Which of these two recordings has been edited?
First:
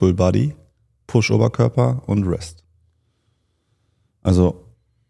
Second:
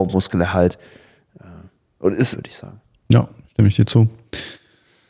second; 1 cut; at 2.3 s

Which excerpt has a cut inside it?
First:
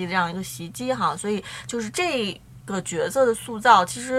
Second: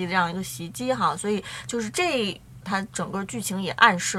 second; 1 cut; at 2.6 s

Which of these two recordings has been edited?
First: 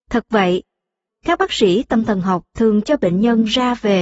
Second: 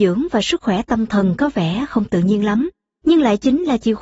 first; 1 cut; at 1.1 s

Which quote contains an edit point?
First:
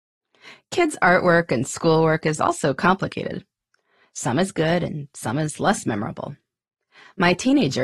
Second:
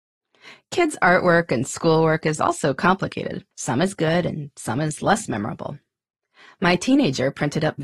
second; 1 cut; at 3.5 s

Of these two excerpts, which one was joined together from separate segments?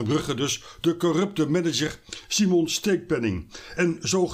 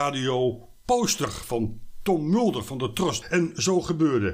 second; 1 cut; at 3.2 s

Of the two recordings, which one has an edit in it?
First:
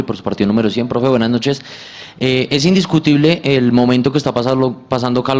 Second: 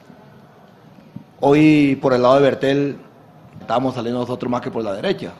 second; 2 cuts; at 2.0 s, 3.6 s

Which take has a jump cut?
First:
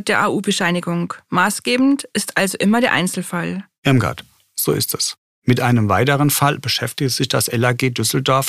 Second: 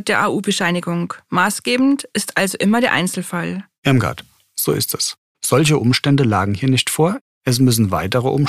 second; 2 cuts; at 5.3 s, 7.3 s

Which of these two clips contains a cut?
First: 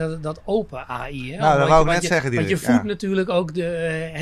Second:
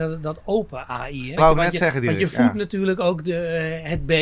second; 1 cut; at 1.4 s

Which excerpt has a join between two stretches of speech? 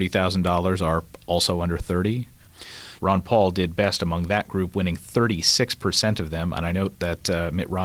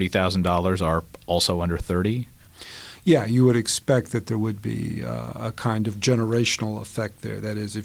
first; 1 cut; at 3.0 s

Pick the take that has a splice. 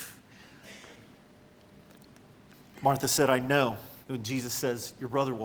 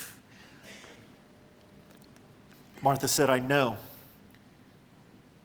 first; 1 cut; at 4.0 s

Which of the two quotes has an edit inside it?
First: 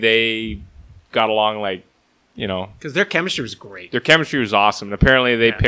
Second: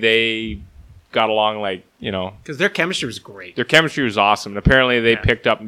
second; 1 cut; at 1.9 s

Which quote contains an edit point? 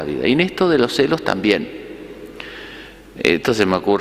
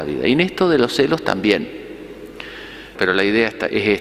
second; 1 cut; at 3.0 s

